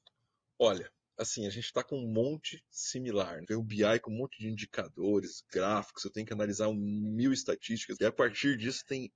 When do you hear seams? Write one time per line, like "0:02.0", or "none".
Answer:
0:03.4
0:08.0